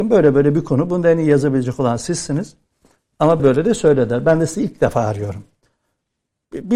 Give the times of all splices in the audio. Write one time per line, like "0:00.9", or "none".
0:03.4

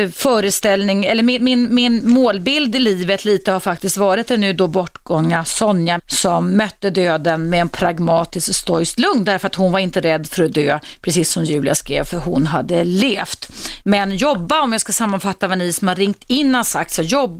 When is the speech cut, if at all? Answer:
0:06.0
0:13.8

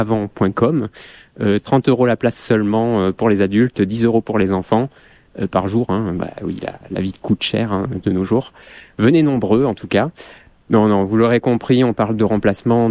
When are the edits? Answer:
none

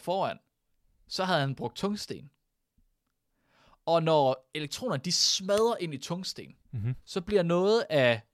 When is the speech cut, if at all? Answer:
0:06.6

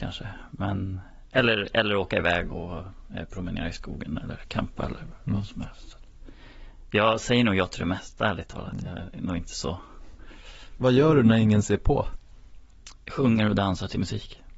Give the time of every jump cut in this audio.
0:02.5

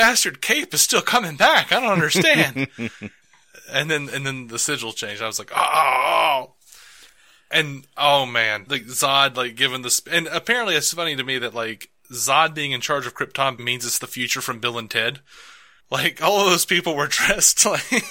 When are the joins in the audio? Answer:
0:08.7
0:13.6

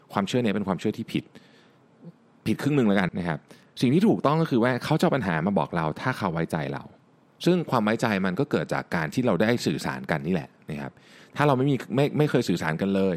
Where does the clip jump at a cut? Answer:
0:03.1

